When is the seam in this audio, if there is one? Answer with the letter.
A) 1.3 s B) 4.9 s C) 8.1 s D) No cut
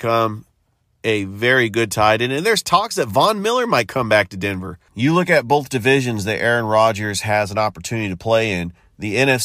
D